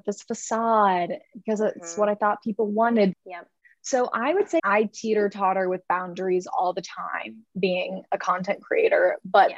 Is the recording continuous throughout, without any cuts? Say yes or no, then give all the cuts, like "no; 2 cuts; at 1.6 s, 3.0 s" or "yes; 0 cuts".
no; 2 cuts; at 3.1 s, 4.6 s